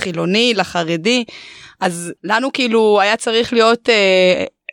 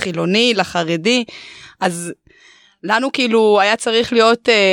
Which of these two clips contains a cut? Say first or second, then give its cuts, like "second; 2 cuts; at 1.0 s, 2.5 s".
first; 1 cut; at 2.2 s